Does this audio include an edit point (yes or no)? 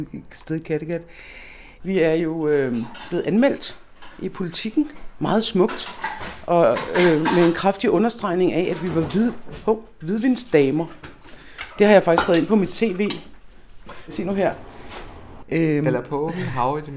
yes